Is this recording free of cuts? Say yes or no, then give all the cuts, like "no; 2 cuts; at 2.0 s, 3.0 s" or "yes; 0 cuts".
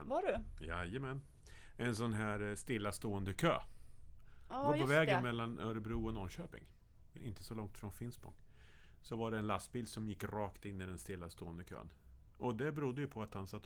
no; 1 cut; at 7.2 s